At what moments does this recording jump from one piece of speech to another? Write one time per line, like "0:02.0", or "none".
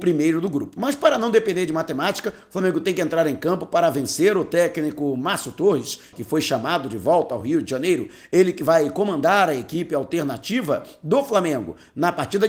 0:06.1